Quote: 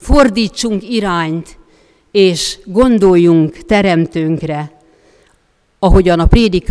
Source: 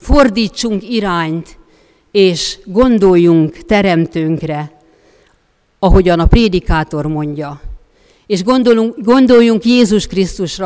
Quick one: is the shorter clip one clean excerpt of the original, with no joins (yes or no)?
yes